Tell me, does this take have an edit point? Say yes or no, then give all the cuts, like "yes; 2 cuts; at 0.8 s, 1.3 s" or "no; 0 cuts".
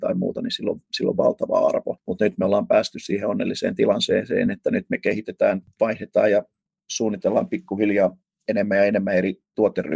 no; 0 cuts